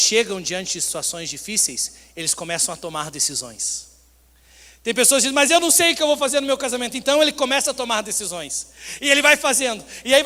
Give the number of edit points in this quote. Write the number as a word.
zero